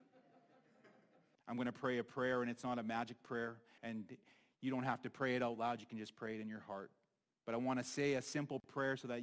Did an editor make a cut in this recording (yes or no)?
yes